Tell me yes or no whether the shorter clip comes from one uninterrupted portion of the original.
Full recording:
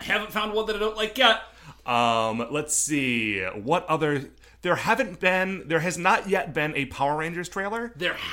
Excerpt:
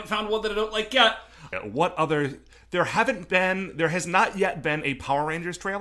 no